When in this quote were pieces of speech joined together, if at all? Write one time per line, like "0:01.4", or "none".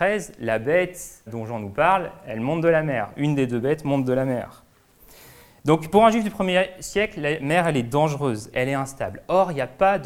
0:01.3
0:08.5